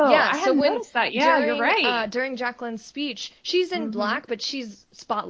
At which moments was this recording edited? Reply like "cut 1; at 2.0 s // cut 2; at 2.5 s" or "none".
none